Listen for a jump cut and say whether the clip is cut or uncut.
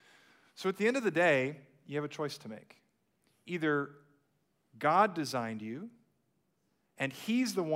uncut